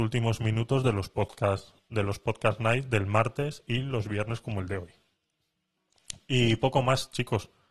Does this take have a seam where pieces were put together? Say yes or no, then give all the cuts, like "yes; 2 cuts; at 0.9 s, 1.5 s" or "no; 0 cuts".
no; 0 cuts